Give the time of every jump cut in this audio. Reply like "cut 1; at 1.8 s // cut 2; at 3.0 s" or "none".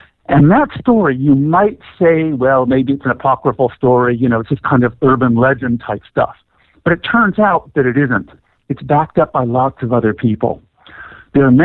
none